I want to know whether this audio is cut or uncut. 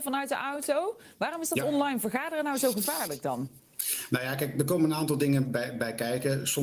uncut